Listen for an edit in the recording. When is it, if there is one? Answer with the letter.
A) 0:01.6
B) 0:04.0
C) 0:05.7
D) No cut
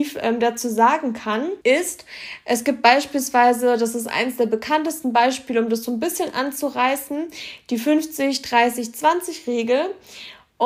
A